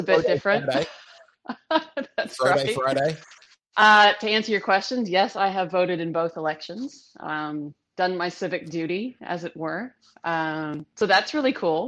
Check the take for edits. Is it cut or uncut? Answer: uncut